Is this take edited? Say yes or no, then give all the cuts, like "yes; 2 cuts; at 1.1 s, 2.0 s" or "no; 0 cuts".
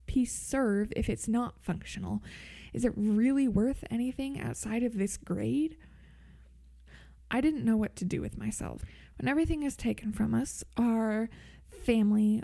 yes; 1 cut; at 9.1 s